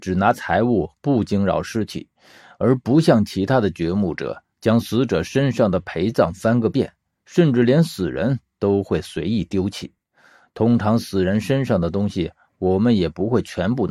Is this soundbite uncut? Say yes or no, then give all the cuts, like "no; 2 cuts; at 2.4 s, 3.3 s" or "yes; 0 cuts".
yes; 0 cuts